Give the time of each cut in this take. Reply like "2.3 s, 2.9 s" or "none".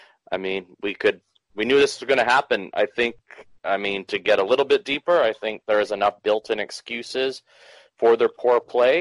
none